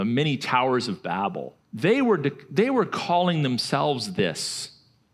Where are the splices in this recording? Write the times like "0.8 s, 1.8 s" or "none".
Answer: 1.6 s